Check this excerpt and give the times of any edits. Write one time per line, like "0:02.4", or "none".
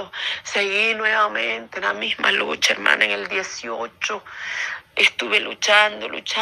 none